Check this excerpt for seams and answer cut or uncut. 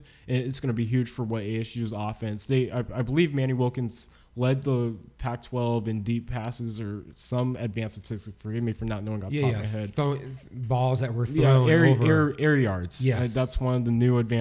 uncut